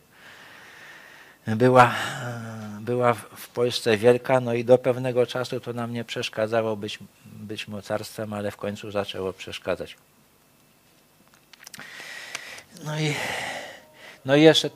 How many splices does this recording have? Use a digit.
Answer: 0